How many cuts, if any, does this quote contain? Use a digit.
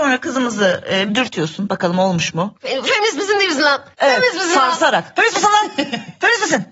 1